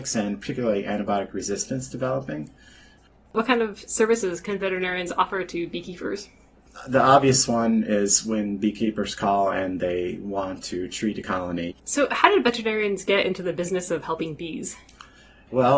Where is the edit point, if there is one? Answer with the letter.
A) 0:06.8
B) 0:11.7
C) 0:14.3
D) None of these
B